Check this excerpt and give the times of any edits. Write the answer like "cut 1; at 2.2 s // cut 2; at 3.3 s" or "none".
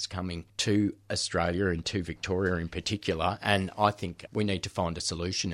none